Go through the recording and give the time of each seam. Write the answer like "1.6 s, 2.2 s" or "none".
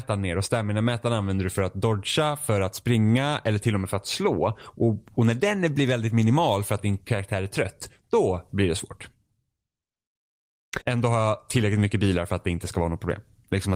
10.8 s